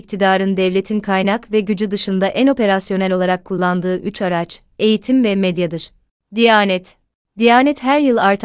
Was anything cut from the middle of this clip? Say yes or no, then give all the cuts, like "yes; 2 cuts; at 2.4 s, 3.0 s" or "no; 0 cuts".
yes; 1 cut; at 4.7 s